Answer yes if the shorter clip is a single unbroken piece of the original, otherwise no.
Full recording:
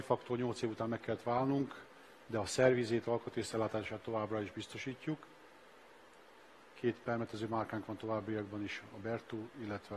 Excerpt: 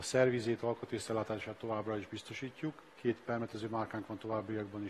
no